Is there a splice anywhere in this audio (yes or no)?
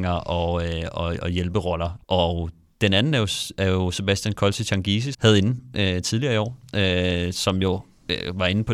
yes